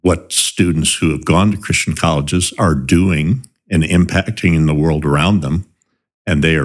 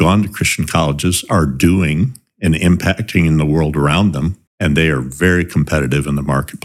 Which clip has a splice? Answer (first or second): second